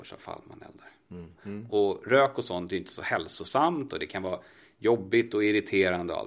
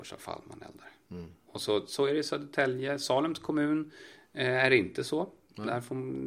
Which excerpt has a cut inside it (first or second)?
first